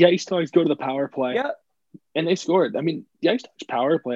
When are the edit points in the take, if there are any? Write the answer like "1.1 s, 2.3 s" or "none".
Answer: none